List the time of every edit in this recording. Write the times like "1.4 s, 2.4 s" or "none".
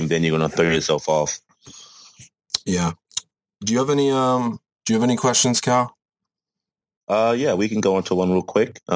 none